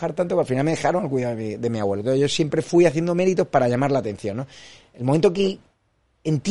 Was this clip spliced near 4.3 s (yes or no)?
no